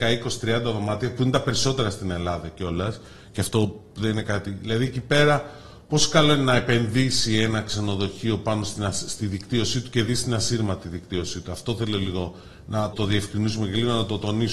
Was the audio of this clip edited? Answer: yes; 1 cut; at 12.9 s

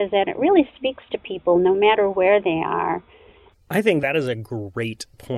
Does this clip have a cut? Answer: yes; 1 cut; at 3.5 s

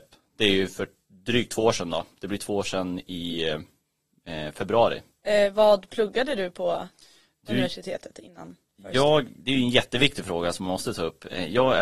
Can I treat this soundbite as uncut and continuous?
no; 1 cut; at 5.2 s

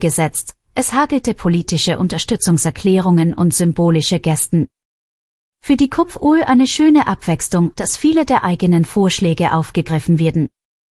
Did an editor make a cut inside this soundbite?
yes; 1 cut; at 7.7 s

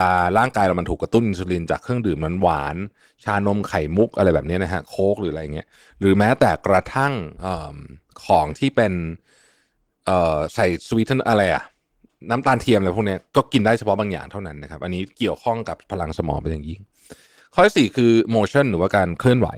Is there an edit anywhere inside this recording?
yes; 1 cut; at 7.4 s

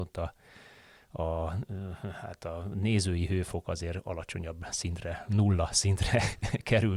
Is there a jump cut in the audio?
no; 0 cuts

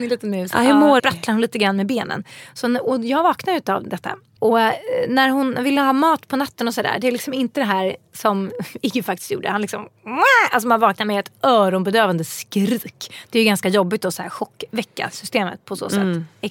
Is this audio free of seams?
no; 2 cuts; at 1.0 s, 4.4 s

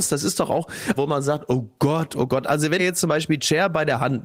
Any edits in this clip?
yes; 2 cuts; at 1.0 s, 2.8 s

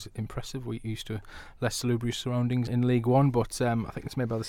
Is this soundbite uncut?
no; 1 cut; at 2.7 s

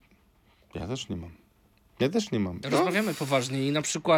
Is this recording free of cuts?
no; 1 cut; at 2.6 s

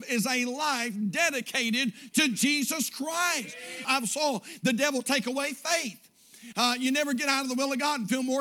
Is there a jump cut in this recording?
yes; 2 cuts; at 3.8 s, 6.5 s

